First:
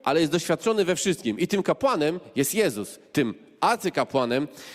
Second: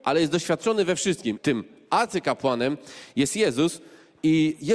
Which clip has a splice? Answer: second; 1 cut; at 1.4 s

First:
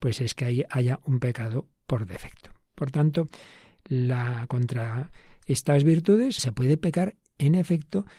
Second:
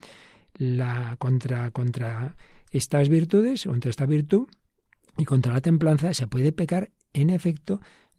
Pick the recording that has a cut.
first; 2 cuts; at 4.5 s, 6.4 s

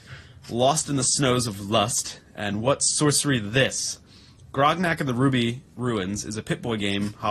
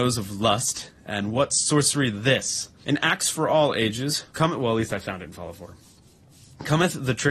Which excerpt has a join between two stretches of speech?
second; 2 cuts; at 2.8 s, 4.3 s

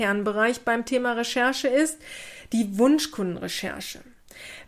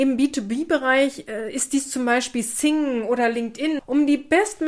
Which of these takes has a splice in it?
second; 1 cut; at 3.8 s

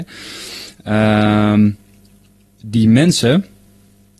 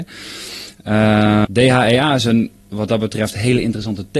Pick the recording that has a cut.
second; 1 cut; at 1.5 s

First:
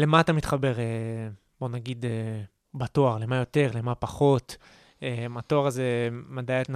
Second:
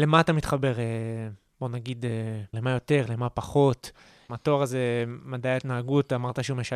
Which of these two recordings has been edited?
second; 2 cuts; at 2.5 s, 4.3 s

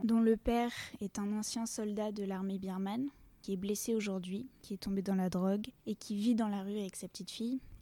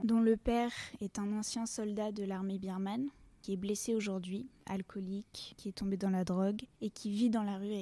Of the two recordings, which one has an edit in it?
first; 1 cut; at 4.6 s

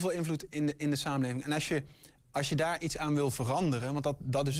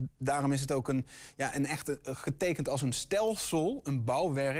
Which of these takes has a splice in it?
first; 1 cut; at 2.2 s

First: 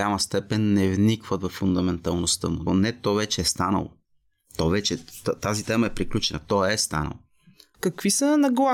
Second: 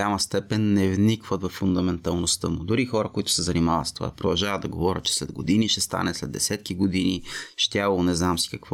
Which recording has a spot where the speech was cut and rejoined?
first; 2 cuts; at 2.7 s, 7.7 s

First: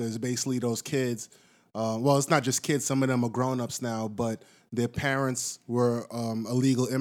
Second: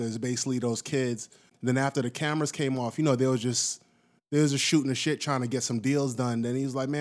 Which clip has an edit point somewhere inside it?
second; 1 cut; at 1.5 s

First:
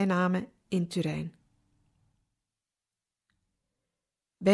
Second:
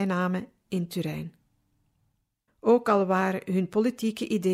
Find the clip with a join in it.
second; 1 cut; at 2.5 s

